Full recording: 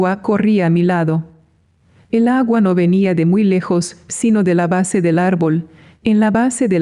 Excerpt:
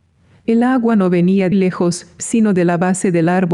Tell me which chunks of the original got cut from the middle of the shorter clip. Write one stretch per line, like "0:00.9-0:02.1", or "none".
0:03.2-0:03.4